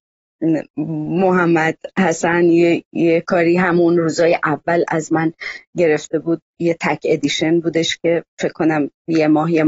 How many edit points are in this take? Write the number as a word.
zero